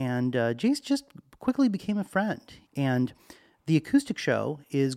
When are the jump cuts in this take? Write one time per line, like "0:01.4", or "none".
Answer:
0:02.6